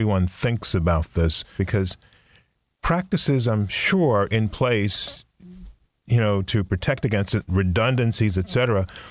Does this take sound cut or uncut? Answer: cut